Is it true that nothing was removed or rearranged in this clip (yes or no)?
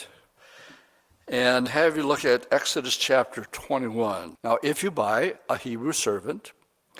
no